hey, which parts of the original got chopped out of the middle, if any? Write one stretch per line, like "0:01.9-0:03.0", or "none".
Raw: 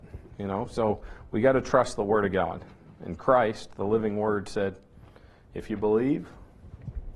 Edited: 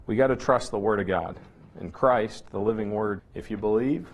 0:04.4-0:05.4